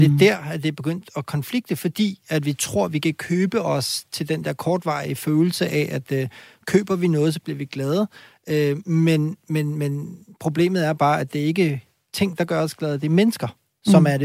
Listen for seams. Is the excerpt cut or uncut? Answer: uncut